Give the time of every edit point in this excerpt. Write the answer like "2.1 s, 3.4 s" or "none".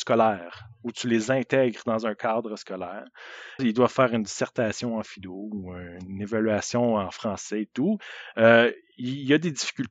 3.6 s